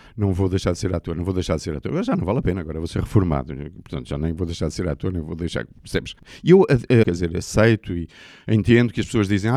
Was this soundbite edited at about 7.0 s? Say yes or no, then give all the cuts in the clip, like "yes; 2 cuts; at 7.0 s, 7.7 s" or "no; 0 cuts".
yes; 1 cut; at 7.0 s